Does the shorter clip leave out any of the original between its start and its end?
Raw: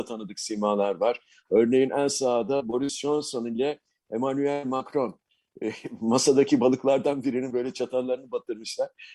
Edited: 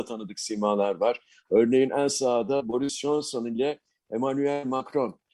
no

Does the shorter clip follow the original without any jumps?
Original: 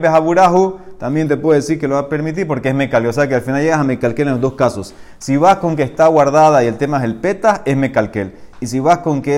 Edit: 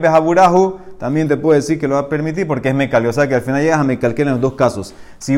yes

